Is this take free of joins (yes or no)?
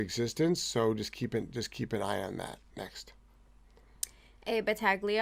yes